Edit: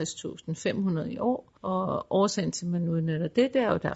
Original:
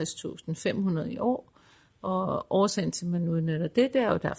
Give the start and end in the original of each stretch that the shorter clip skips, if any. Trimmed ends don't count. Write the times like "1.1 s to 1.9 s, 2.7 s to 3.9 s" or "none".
1.6 s to 2.0 s